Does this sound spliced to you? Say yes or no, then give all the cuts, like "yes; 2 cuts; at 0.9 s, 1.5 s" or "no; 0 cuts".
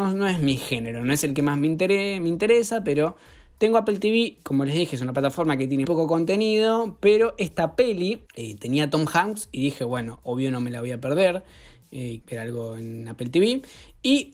yes; 3 cuts; at 5.8 s, 8.3 s, 12.2 s